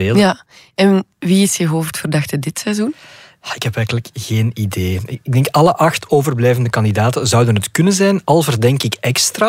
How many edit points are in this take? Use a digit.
1